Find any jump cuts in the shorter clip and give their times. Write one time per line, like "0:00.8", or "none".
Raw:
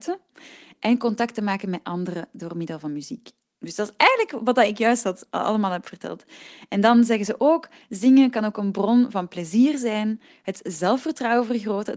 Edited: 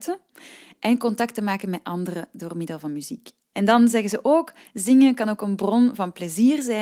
0:03.5

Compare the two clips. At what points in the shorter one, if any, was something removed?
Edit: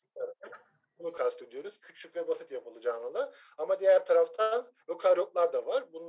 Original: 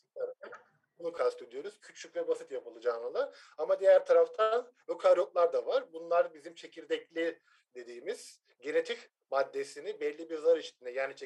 none

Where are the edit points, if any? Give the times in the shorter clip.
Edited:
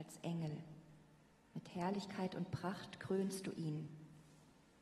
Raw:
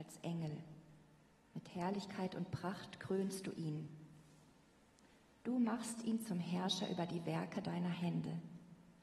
none

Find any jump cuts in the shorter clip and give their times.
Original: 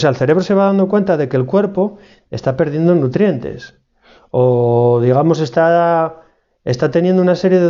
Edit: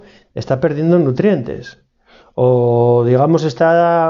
none

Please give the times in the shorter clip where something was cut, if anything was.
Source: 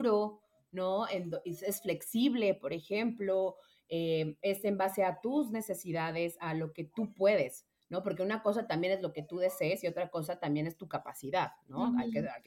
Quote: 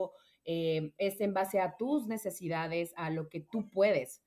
none

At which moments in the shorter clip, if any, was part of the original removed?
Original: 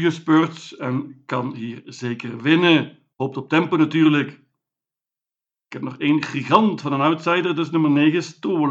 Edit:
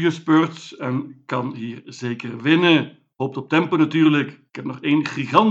0:04.5

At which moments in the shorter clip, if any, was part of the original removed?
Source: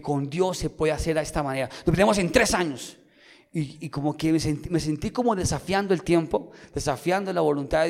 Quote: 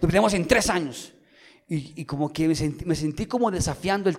none

